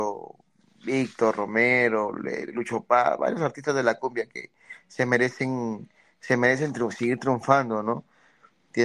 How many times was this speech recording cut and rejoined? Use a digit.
0